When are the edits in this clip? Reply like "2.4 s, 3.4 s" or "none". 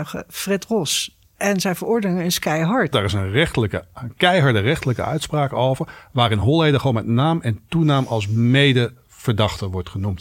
1.2 s, 2.9 s